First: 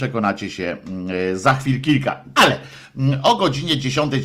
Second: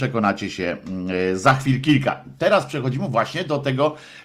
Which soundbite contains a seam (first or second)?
first